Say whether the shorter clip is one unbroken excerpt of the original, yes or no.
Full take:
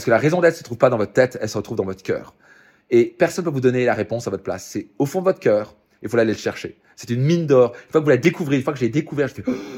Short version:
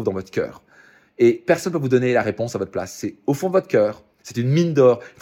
no